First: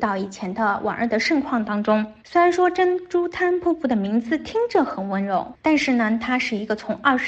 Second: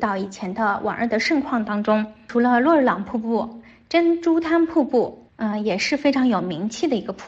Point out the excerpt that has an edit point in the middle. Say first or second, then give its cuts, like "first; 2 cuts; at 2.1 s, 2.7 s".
first; 1 cut; at 2.2 s